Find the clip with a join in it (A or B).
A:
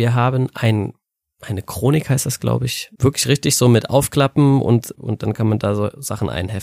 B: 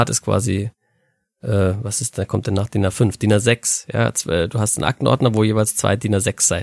A